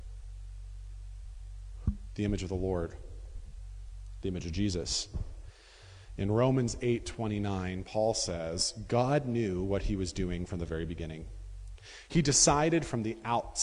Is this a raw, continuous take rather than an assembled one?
yes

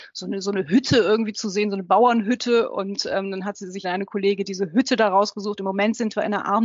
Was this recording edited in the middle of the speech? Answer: yes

